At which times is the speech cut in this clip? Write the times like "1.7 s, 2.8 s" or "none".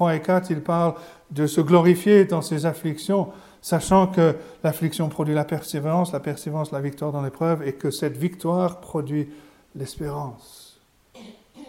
none